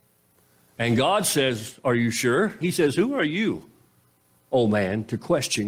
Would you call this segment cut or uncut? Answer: cut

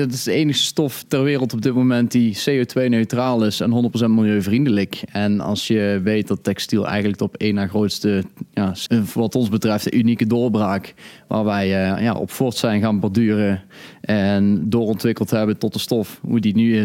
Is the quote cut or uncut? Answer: cut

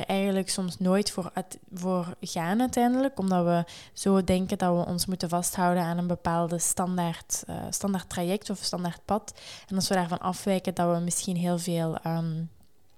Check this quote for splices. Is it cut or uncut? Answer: uncut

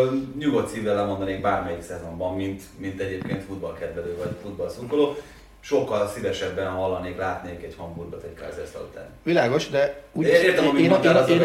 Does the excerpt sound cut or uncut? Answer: uncut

